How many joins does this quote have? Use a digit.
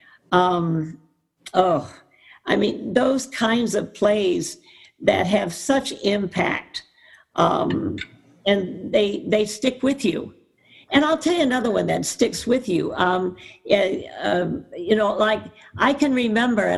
0